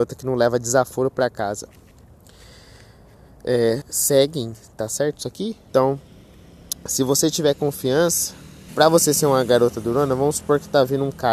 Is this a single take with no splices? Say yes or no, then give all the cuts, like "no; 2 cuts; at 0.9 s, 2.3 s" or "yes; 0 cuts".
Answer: no; 3 cuts; at 3.8 s, 5.7 s, 8.7 s